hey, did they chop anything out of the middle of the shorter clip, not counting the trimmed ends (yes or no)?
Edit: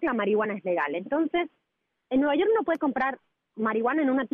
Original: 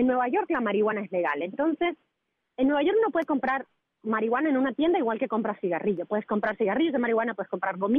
no